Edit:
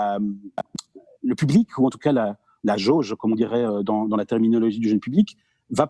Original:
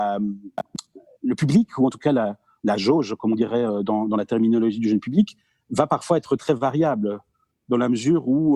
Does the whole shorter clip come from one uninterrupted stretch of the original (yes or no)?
yes